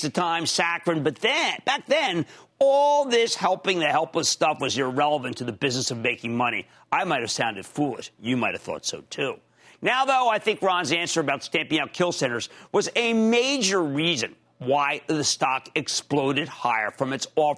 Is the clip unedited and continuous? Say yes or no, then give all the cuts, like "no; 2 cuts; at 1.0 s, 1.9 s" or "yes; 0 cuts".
yes; 0 cuts